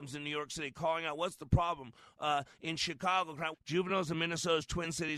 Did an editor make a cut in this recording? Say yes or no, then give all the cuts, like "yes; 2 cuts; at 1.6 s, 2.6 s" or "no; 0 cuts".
yes; 1 cut; at 3.5 s